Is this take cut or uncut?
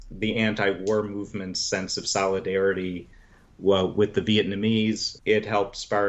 cut